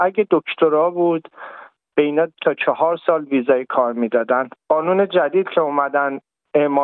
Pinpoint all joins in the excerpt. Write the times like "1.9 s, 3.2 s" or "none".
4.6 s